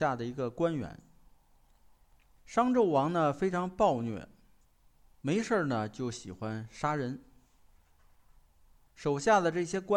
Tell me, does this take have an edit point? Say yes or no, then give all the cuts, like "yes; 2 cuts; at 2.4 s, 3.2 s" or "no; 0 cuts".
no; 0 cuts